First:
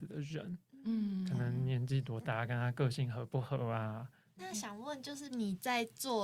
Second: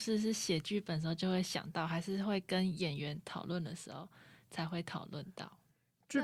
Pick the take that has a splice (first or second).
first